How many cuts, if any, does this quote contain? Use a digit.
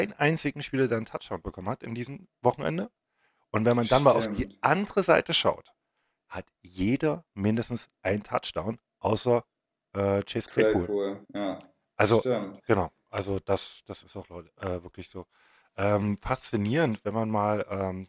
2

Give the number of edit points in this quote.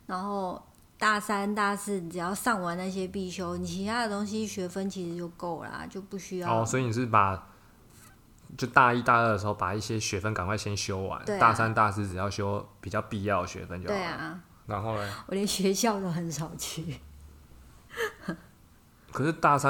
1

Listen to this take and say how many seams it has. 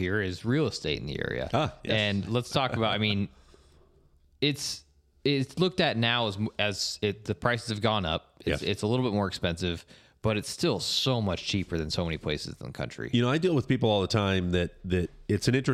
0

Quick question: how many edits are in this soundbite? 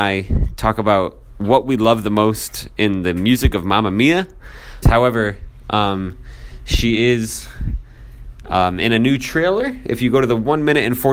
1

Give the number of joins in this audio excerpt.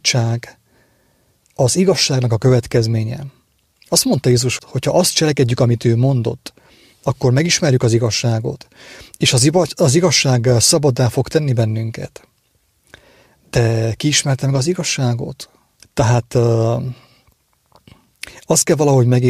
2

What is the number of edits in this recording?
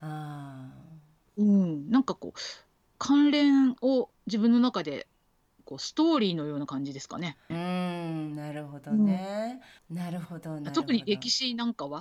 2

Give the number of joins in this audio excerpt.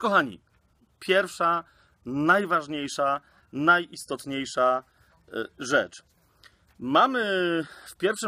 0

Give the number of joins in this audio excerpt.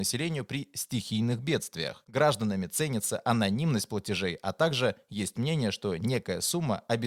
1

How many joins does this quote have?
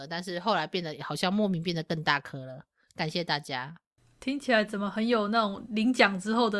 0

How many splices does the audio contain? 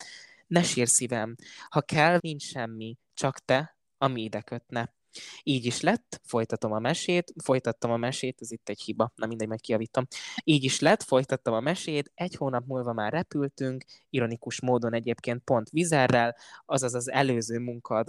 1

